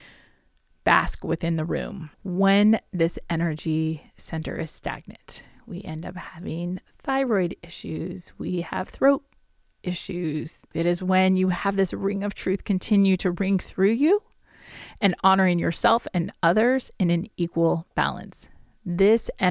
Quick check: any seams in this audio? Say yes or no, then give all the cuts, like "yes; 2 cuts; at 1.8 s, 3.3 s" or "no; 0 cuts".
yes; 2 cuts; at 2.1 s, 10.7 s